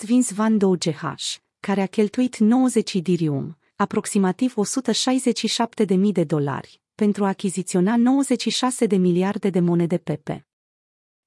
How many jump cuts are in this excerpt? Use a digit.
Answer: 0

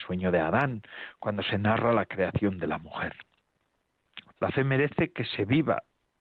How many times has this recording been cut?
1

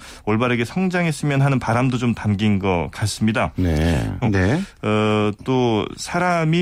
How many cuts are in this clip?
1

